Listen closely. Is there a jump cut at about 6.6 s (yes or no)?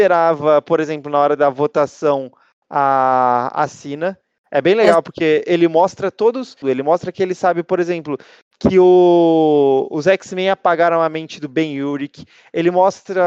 yes